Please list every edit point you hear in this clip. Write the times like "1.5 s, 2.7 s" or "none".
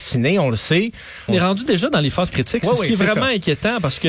1.3 s